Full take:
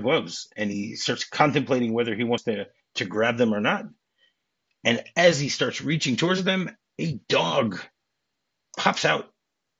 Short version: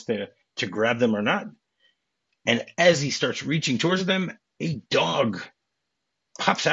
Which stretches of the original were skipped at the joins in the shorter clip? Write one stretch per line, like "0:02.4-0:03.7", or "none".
none